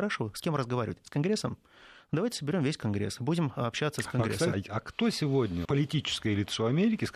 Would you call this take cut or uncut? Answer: cut